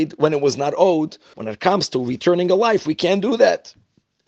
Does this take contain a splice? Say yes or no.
yes